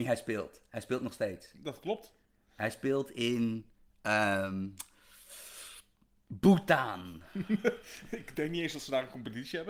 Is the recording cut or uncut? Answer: uncut